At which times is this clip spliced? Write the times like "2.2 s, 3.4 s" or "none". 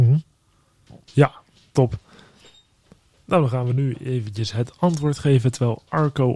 1.0 s